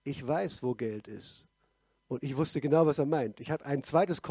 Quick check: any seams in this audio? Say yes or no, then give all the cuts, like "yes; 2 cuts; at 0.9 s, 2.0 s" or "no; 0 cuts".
no; 0 cuts